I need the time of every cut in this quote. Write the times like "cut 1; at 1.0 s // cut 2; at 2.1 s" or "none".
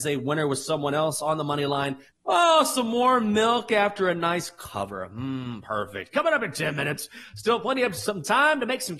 cut 1; at 2.1 s